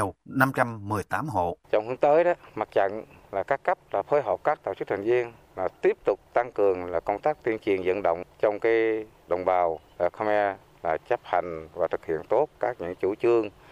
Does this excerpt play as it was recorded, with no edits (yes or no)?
no